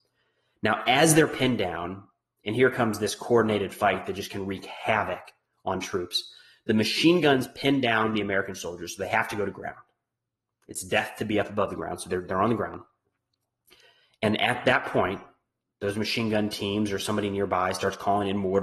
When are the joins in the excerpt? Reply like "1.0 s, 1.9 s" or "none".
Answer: none